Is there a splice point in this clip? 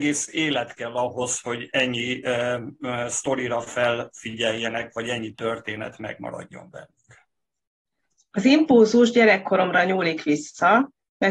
no; 0 cuts

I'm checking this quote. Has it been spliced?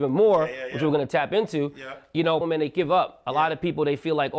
yes; 1 cut; at 2.4 s

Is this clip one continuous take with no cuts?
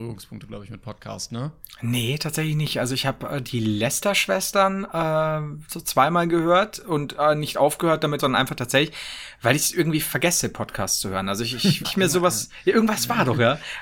no; 2 cuts; at 8.2 s, 11.8 s

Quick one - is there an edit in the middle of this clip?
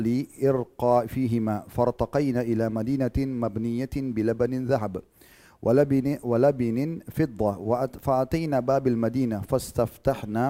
no; 0 cuts

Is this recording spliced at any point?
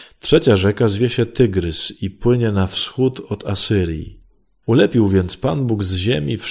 yes; 1 cut; at 4.6 s

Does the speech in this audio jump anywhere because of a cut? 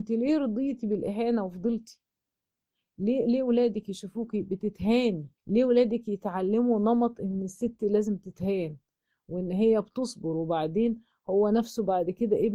yes; 1 cut; at 5.4 s

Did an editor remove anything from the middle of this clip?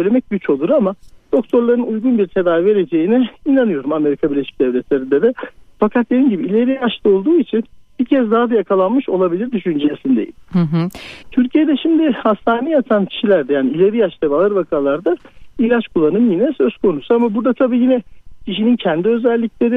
yes; 1 cut; at 11.2 s

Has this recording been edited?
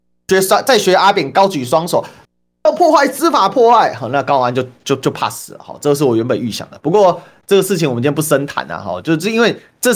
no; 0 cuts

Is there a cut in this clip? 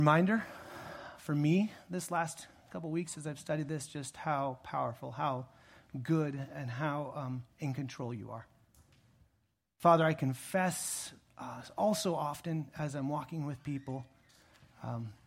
no; 0 cuts

